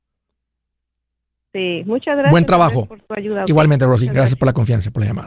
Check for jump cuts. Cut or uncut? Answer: uncut